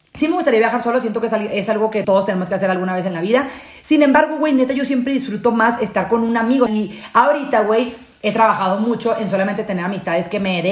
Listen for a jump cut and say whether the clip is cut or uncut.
cut